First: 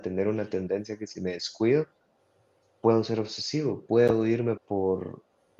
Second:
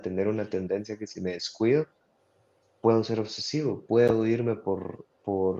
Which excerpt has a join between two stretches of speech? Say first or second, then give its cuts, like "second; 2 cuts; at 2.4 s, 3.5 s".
first; 1 cut; at 4.6 s